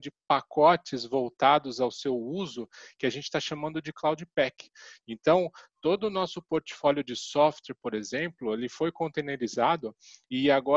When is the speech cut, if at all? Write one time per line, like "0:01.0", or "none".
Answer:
0:05.0